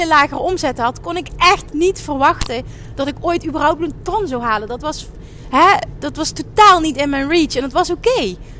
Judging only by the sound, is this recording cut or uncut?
uncut